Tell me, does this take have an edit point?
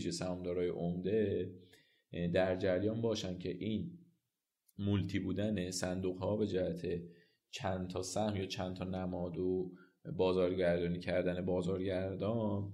no; 0 cuts

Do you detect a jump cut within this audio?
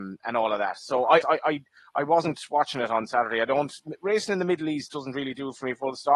yes; 1 cut; at 1.2 s

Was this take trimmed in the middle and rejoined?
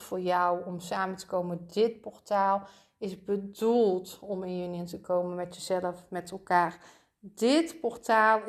no; 0 cuts

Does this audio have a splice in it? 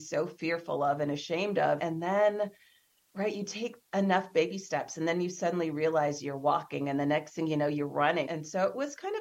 yes; 2 cuts; at 1.8 s, 8.3 s

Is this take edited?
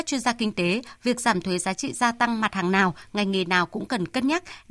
no; 0 cuts

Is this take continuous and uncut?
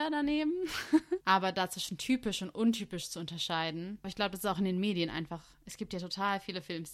no; 2 cuts; at 1.2 s, 4.0 s

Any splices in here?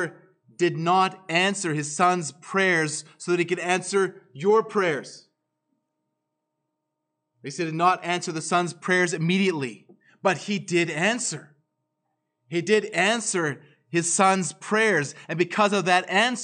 no; 0 cuts

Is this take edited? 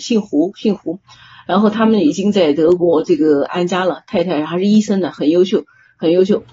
no; 0 cuts

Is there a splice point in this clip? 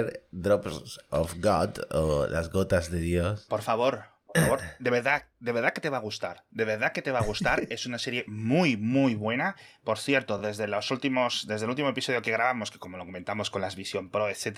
no; 0 cuts

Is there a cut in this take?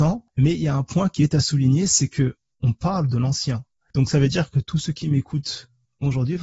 no; 0 cuts

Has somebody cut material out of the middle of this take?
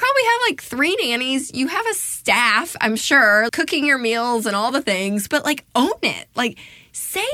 yes; 2 cuts; at 3.5 s, 5.3 s

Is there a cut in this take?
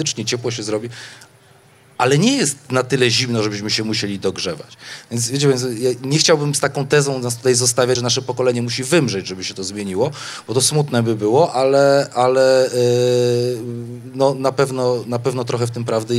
no; 0 cuts

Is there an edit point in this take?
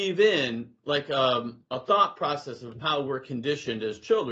no; 0 cuts

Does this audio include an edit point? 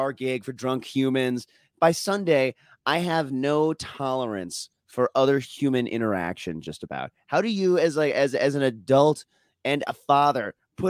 no; 0 cuts

